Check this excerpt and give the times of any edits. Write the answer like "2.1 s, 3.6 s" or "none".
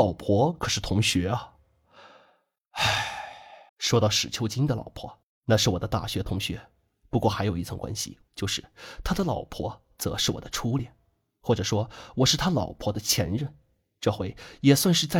3.7 s, 8.3 s